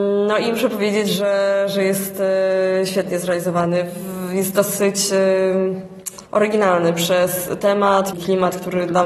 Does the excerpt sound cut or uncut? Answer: cut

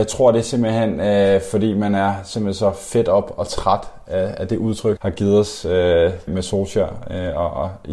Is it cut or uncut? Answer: cut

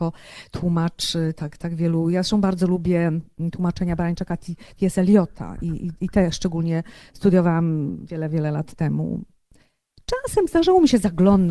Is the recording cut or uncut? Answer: cut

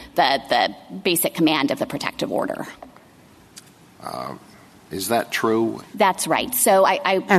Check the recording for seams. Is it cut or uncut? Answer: cut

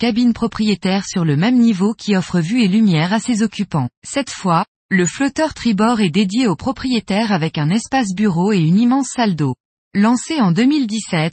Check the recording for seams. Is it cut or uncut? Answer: cut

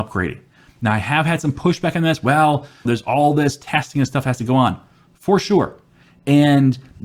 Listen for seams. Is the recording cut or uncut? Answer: cut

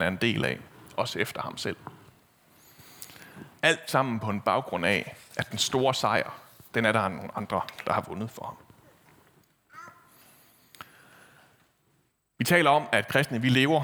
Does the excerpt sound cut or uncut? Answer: uncut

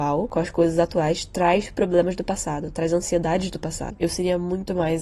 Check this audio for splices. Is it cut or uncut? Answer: cut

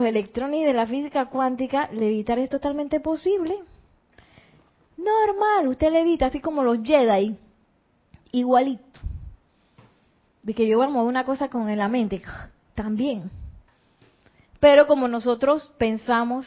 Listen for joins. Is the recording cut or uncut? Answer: uncut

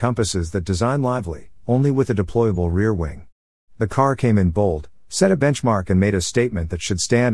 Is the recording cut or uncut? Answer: cut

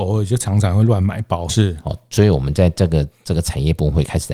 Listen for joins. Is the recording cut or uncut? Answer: cut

